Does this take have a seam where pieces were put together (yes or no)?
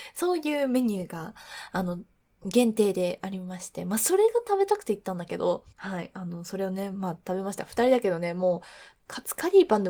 yes